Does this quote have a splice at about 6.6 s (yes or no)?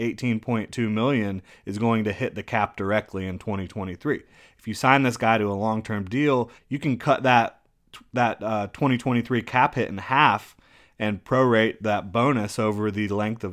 yes